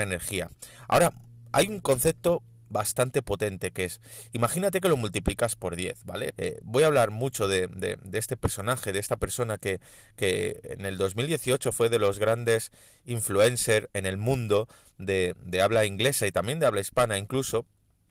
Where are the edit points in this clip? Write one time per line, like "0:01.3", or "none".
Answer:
0:06.3